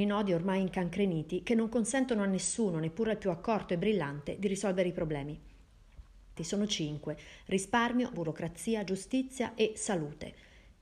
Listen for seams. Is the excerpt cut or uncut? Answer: cut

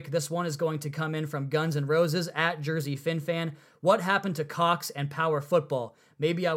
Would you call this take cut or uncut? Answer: uncut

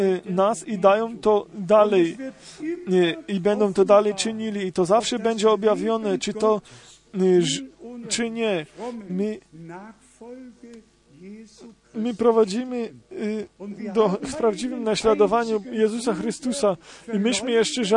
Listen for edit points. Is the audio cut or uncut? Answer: cut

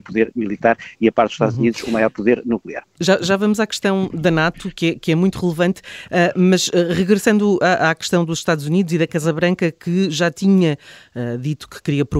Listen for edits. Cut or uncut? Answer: uncut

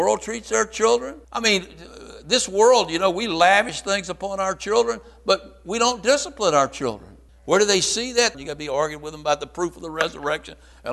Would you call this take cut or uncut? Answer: cut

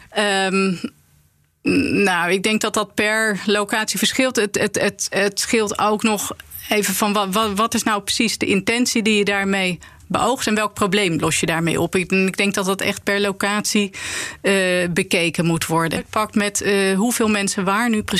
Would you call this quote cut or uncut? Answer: cut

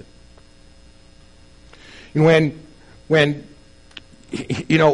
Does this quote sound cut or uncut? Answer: uncut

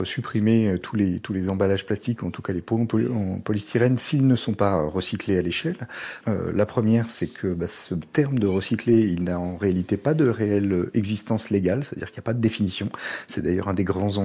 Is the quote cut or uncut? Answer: cut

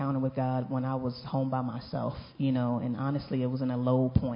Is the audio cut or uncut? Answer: uncut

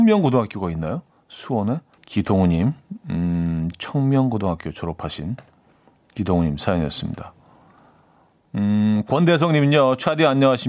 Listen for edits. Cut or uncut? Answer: cut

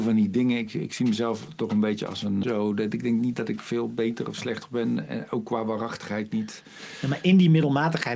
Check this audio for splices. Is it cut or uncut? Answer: cut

